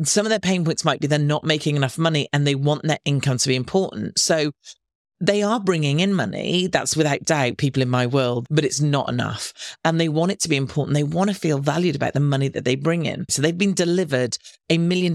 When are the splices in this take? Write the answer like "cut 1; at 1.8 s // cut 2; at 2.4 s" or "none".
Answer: cut 1; at 8.5 s // cut 2; at 13.3 s